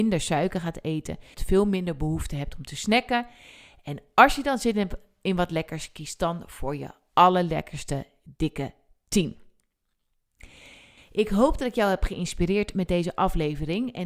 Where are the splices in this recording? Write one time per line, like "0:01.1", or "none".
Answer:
0:01.3